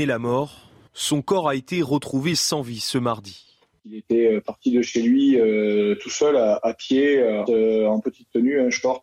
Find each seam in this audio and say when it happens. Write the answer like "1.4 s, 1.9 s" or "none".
7.5 s